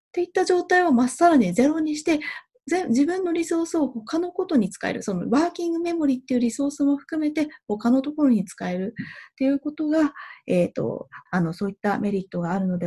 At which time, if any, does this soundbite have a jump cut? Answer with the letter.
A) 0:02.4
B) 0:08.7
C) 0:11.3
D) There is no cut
C